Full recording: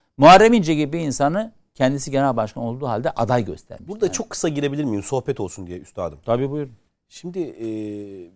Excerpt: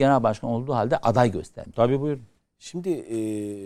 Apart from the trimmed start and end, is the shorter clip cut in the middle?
yes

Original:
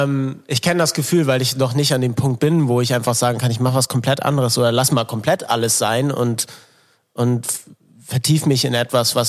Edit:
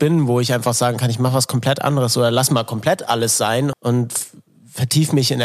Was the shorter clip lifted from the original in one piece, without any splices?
no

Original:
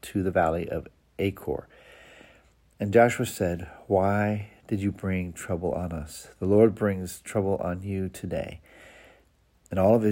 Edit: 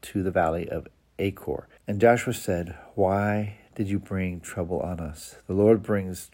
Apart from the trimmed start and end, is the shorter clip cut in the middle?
yes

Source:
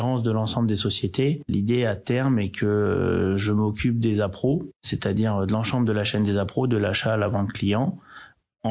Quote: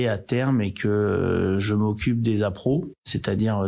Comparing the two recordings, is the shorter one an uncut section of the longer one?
yes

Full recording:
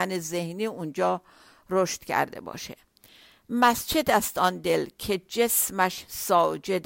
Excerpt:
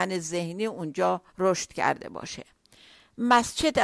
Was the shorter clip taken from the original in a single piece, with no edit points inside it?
no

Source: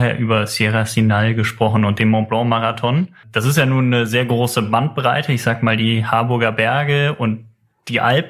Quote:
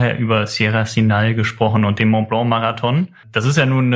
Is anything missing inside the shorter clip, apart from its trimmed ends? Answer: no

